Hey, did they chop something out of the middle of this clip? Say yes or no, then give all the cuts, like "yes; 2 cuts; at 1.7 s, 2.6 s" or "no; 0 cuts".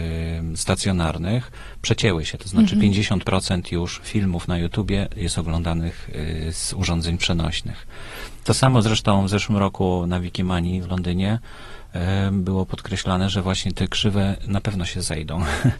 no; 0 cuts